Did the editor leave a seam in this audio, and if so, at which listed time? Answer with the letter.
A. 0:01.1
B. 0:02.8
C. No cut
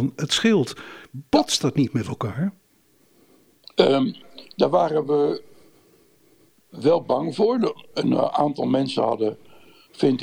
C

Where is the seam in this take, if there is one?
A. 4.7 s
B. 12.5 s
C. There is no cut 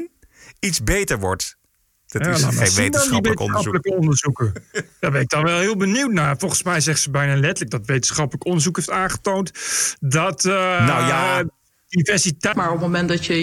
B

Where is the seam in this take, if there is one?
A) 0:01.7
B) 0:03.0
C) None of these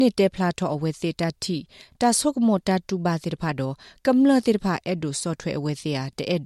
C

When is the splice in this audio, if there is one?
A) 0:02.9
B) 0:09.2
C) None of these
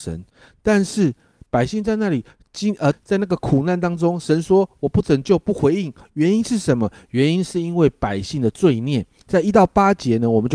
A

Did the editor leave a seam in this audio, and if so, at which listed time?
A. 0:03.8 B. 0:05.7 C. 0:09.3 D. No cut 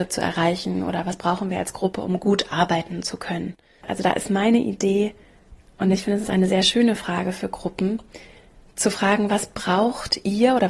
A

